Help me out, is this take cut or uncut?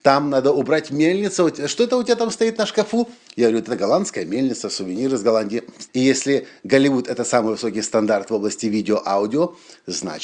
cut